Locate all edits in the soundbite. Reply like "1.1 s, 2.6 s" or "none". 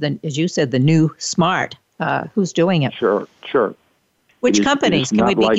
4.3 s